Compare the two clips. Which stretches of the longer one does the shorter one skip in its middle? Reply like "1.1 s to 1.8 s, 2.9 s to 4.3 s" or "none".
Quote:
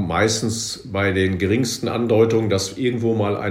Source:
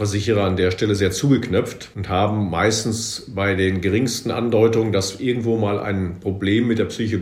none